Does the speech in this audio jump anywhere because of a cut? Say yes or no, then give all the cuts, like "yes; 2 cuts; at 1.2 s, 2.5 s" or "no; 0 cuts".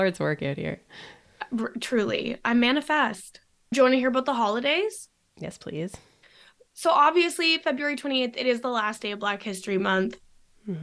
no; 0 cuts